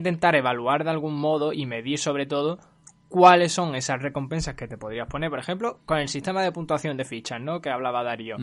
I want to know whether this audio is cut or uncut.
uncut